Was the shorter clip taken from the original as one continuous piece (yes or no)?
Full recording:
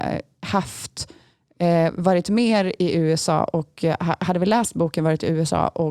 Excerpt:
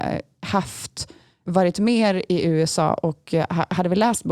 no